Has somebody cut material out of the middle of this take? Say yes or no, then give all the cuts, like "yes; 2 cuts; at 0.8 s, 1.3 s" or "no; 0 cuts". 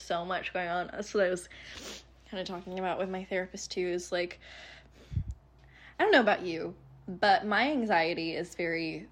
no; 0 cuts